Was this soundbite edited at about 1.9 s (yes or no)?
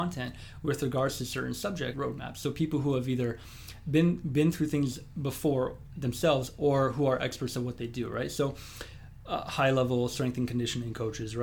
yes